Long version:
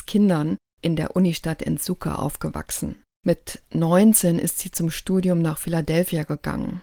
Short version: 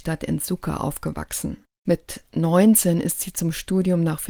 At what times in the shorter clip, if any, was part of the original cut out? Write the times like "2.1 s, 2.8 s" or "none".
none